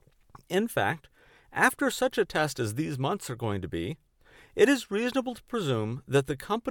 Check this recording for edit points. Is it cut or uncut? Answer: uncut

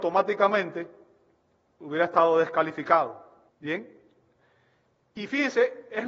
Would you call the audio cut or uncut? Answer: cut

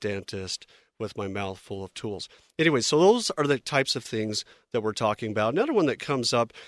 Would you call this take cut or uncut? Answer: uncut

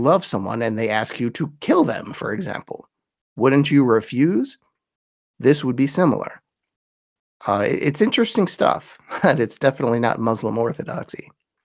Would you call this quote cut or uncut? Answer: uncut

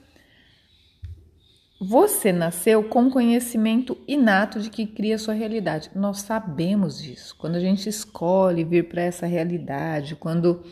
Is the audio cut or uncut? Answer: uncut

